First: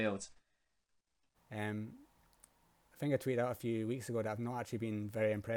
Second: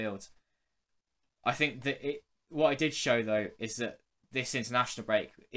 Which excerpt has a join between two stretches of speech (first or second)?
first